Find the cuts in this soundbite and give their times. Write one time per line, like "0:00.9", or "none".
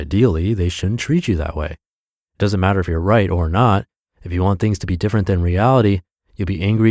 none